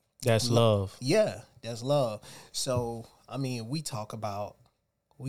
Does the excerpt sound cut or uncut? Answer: uncut